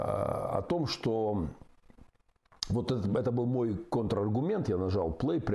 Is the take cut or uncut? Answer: uncut